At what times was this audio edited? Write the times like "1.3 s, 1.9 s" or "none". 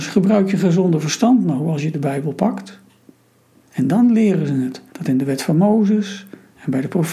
3.6 s, 4.9 s